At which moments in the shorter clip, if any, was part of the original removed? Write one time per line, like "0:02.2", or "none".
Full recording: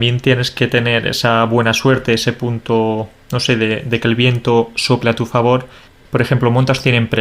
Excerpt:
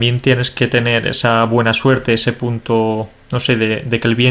none